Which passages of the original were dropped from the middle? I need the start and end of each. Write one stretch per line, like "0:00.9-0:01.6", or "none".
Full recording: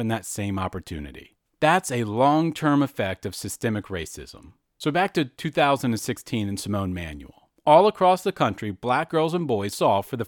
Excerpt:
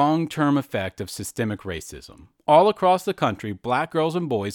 0:04.6-0:07.6